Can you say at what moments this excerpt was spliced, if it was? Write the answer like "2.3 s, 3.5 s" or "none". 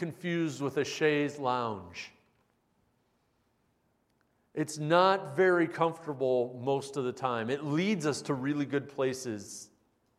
none